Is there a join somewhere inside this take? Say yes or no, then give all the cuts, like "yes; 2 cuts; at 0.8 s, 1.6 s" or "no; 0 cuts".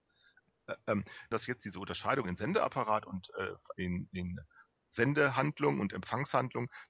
yes; 2 cuts; at 1.3 s, 3.7 s